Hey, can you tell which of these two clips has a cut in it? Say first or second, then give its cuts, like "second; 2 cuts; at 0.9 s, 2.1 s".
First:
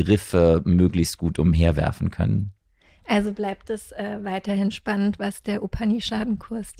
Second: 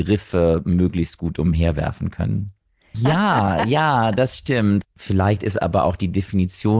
second; 2 cuts; at 2.9 s, 4.8 s